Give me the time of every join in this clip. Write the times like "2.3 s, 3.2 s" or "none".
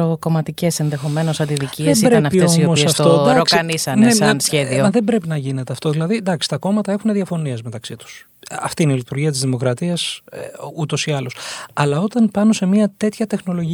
none